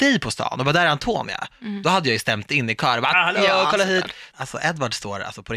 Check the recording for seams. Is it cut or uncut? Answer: cut